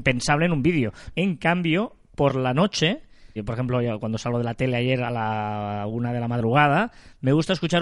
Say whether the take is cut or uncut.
cut